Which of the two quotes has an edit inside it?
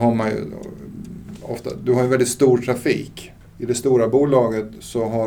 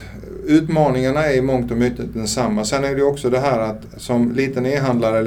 first; 1 cut; at 3.4 s

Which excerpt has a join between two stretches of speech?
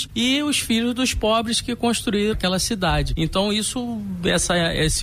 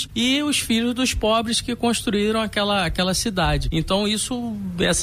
first; 1 cut; at 2.3 s

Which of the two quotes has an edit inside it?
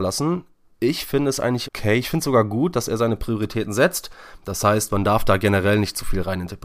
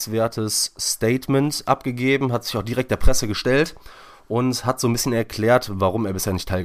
first; 2 cuts; at 1.7 s, 4.4 s

